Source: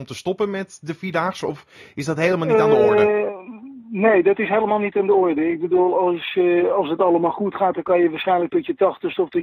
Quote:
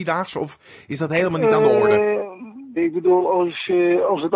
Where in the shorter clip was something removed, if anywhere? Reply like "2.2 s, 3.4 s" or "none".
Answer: 2.8 s

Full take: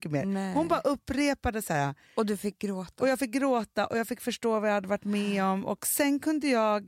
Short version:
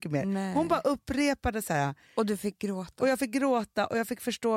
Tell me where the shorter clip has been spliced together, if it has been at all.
none

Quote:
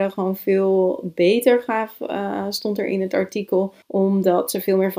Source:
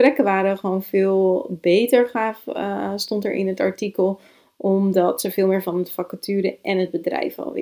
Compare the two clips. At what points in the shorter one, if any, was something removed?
3.8 s

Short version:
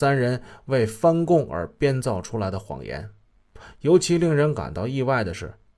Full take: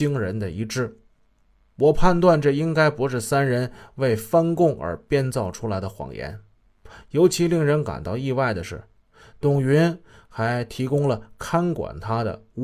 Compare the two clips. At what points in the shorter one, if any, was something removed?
none

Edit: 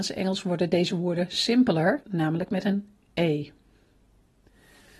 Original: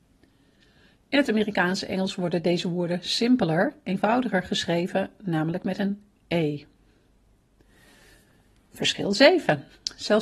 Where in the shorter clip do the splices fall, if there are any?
2.0 s

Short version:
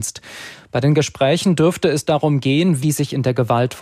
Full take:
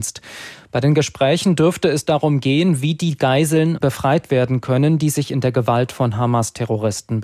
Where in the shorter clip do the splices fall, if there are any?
2.8 s

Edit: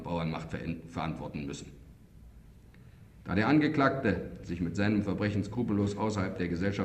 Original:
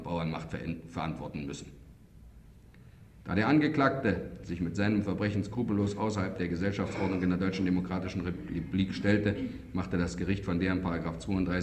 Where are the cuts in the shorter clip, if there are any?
none

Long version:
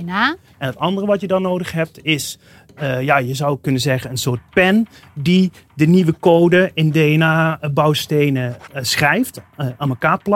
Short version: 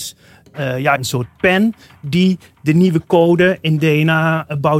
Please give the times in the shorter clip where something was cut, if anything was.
1.0 s

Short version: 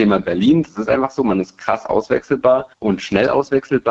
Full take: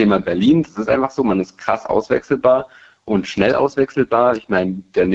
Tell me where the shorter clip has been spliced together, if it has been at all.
2.7 s

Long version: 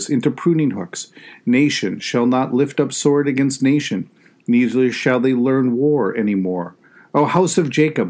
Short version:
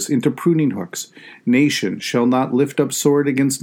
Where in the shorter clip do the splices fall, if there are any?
none

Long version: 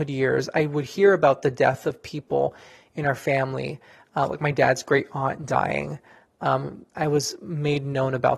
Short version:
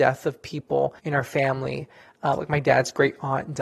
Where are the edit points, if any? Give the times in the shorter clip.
1.0 s

